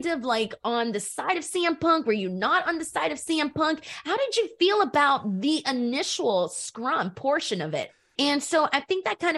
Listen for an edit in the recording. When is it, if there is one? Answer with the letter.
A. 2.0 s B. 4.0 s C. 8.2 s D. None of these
C